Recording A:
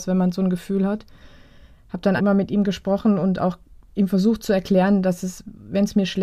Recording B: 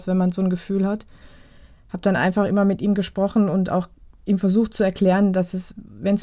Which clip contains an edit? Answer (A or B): A